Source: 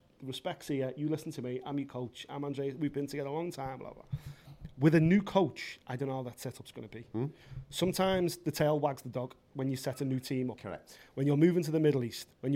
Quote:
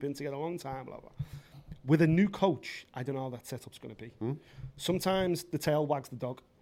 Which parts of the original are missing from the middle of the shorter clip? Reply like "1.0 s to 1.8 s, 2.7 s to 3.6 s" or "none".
none